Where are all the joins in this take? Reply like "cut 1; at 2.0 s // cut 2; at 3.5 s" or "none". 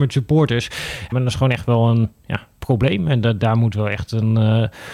cut 1; at 1.1 s